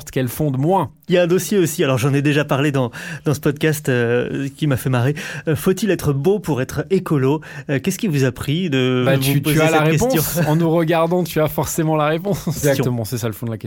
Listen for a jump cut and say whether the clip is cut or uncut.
cut